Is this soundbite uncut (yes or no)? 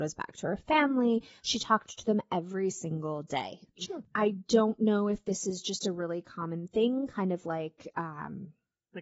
no